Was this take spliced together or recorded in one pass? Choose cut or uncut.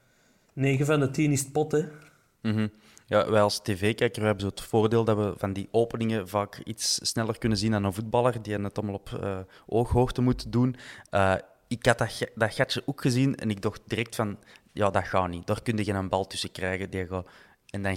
uncut